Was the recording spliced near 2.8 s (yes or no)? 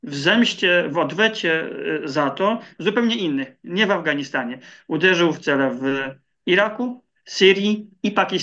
yes